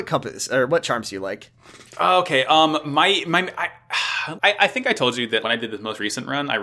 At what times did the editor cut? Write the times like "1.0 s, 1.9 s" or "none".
4.4 s, 5.4 s